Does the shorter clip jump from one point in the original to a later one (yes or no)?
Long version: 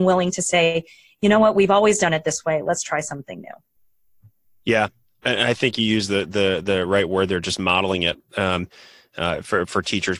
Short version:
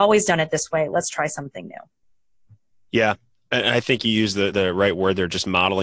yes